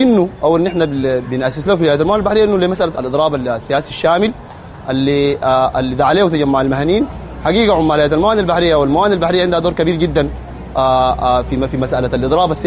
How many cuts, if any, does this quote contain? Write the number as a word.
two